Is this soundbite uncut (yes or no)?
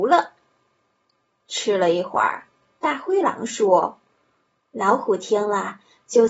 no